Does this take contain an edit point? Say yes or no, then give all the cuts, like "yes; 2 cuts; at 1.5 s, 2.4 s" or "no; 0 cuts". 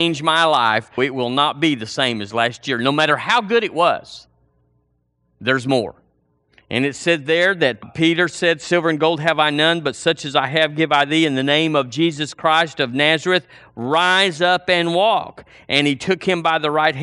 yes; 1 cut; at 1.0 s